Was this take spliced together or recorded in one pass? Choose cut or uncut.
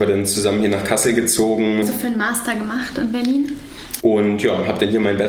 cut